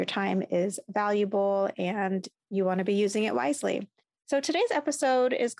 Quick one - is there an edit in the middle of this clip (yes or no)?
no